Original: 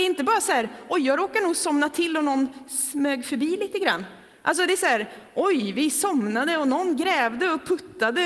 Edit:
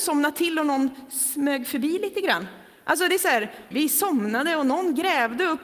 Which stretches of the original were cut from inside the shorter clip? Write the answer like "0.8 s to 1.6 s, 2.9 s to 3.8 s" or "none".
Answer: 5.3 s to 5.7 s

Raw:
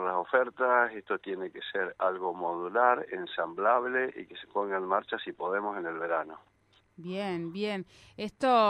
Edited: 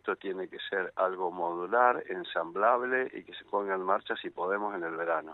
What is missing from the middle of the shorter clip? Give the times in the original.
none

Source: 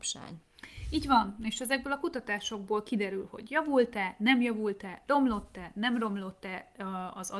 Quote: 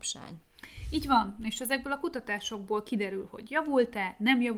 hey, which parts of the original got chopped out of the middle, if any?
none

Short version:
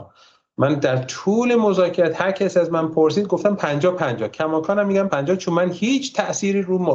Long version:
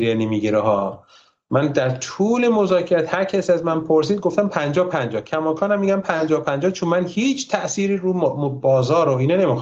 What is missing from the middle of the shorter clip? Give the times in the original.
6.0 s to 6.4 s

